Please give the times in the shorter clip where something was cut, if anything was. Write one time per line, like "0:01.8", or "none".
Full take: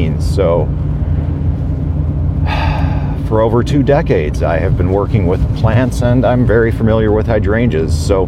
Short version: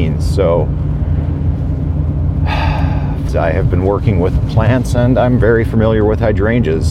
0:03.3